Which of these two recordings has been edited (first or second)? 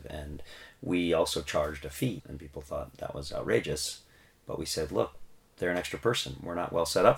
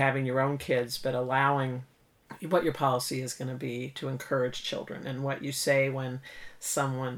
first